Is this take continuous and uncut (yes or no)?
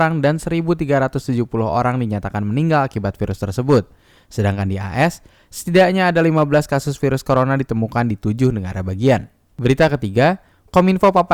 yes